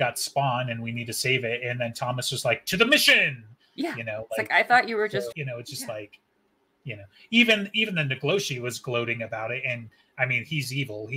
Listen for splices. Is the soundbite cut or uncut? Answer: cut